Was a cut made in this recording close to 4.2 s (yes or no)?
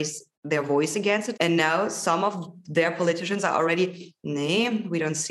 no